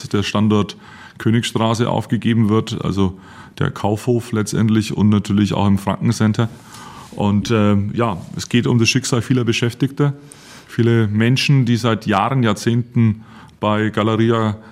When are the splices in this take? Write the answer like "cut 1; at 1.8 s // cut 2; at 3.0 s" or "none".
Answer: none